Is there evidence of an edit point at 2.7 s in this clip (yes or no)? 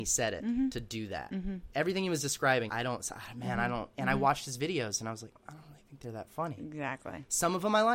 yes